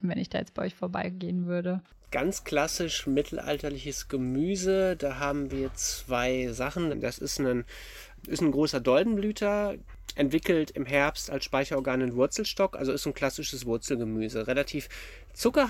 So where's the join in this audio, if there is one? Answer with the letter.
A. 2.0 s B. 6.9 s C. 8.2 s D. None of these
B